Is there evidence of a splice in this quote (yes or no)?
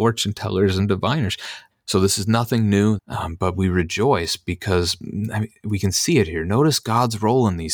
yes